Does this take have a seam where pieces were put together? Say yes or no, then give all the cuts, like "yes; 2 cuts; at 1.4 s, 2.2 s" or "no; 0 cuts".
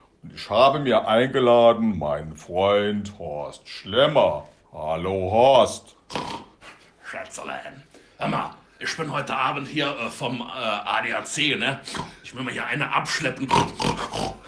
yes; 1 cut; at 8.8 s